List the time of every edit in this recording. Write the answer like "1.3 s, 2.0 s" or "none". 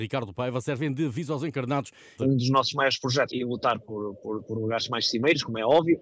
2.2 s, 3.3 s